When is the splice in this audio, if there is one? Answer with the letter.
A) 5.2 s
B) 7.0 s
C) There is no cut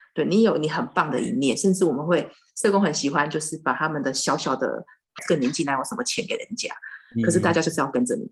A